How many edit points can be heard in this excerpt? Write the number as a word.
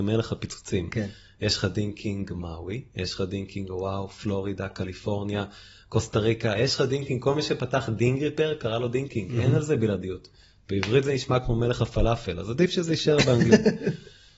zero